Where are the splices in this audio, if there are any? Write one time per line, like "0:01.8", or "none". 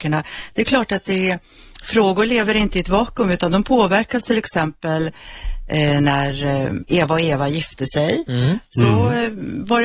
none